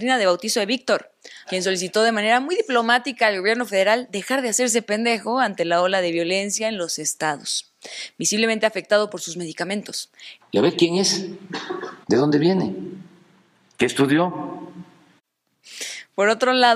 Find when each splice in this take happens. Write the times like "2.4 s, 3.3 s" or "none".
1.4 s, 10.4 s, 12.0 s